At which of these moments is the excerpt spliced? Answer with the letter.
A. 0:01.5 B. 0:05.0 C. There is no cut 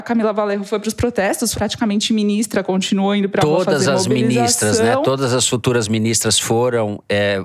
A